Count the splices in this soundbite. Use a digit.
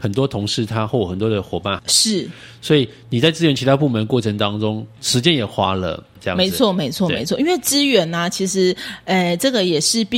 2